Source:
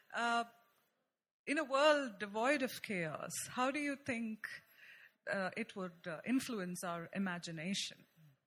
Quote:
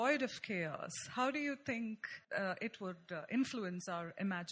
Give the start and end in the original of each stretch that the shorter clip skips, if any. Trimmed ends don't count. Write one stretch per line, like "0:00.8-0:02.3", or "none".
0:04.6-0:05.2